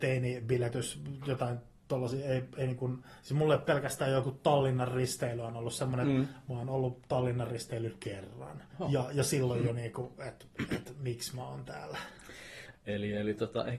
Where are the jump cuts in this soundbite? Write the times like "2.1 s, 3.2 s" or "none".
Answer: 8.7 s, 12.7 s